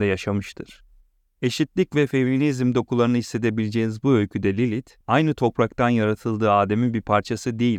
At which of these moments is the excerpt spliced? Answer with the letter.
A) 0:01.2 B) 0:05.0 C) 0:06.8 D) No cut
B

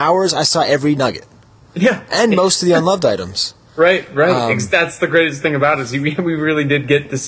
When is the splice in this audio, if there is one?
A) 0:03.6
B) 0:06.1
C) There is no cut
C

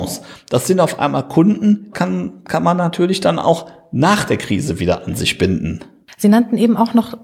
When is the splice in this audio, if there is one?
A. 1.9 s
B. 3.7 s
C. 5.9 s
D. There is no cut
A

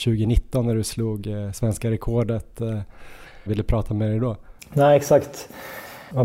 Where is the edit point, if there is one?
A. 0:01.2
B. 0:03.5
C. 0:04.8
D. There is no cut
B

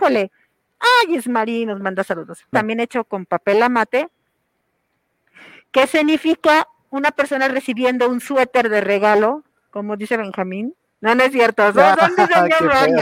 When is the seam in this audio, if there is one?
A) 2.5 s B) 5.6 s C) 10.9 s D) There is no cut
A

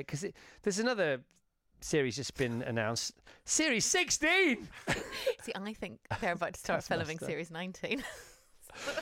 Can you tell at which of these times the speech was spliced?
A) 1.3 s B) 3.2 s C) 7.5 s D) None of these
D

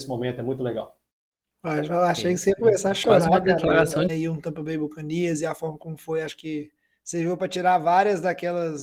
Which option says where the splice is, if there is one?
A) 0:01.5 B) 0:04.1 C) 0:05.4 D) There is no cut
B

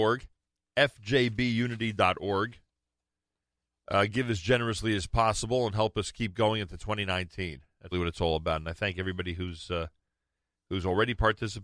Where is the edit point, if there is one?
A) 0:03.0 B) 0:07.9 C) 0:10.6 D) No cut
B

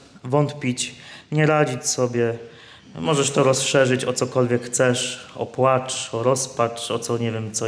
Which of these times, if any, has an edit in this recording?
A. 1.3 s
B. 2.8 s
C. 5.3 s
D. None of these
D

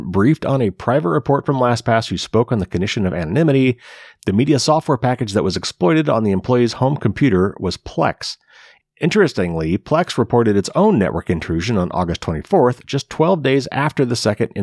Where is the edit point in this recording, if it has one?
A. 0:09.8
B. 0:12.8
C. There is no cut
C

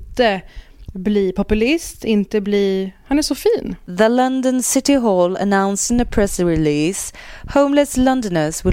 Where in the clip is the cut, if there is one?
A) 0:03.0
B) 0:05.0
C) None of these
C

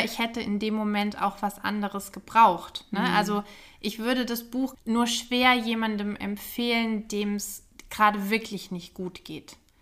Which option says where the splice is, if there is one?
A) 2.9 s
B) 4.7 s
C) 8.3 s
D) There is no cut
B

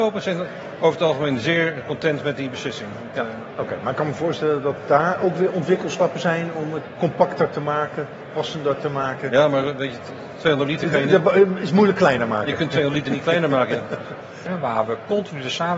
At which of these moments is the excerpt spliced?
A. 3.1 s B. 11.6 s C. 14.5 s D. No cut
C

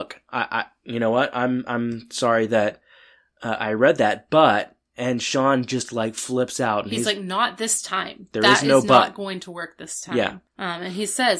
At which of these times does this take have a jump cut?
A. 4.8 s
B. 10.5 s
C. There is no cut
B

